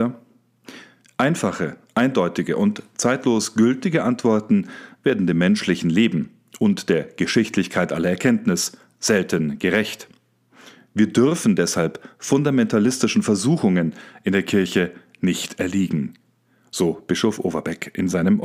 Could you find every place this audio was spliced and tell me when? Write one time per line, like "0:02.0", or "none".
none